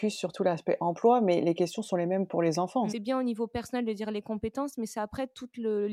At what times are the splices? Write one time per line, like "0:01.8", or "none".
0:02.9